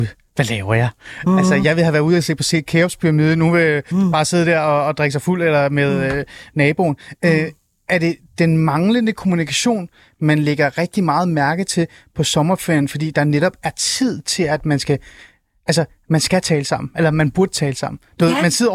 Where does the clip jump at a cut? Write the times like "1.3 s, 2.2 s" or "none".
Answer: none